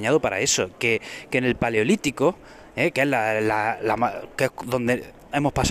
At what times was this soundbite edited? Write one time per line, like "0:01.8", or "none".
none